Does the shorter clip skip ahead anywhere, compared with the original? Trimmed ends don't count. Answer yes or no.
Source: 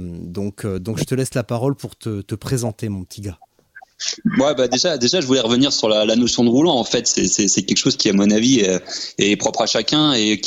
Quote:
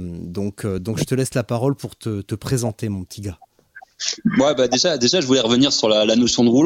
no